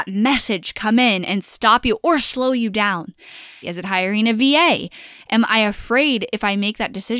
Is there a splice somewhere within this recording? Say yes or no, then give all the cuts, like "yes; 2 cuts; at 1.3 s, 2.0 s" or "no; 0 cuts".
yes; 1 cut; at 3.6 s